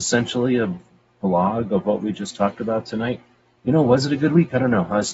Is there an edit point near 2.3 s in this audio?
no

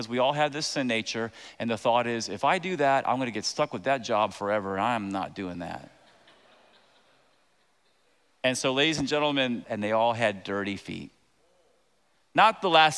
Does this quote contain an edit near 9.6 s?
yes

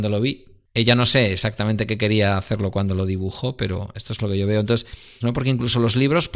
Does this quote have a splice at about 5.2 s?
yes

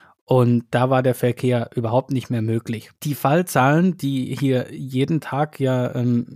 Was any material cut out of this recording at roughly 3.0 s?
yes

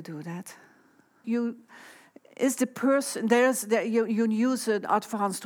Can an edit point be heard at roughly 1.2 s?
yes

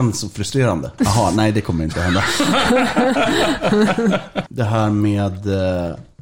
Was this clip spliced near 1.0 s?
yes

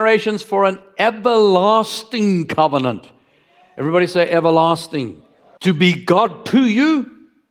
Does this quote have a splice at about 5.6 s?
yes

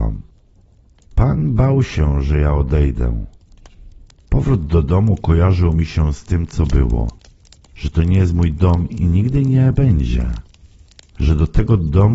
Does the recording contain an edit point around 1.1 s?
yes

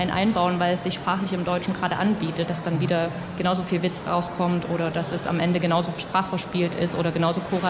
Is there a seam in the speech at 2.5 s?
yes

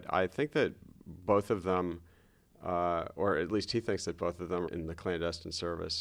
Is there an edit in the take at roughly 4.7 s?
yes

